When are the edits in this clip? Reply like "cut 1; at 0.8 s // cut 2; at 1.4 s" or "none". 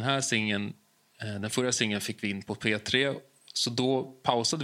none